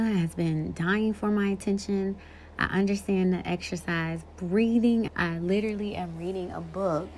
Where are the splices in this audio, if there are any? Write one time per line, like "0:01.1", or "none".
0:05.1